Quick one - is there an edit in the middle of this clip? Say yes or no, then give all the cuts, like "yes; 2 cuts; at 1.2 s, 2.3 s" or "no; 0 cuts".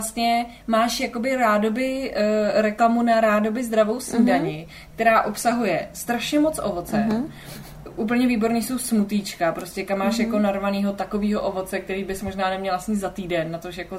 no; 0 cuts